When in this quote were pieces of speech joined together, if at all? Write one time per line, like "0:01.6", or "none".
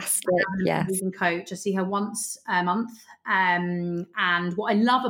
none